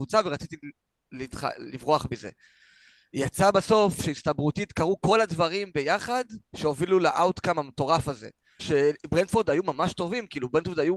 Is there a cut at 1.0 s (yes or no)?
no